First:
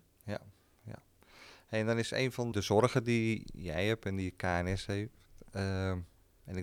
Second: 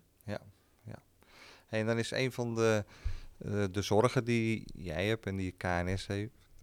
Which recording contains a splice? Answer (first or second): first